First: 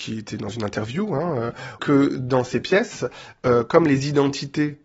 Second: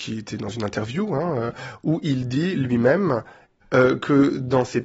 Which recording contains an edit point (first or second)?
first